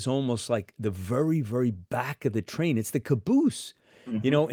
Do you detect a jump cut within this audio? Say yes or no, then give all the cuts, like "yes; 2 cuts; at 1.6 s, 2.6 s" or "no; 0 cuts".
no; 0 cuts